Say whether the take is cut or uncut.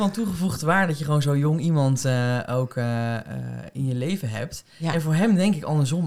uncut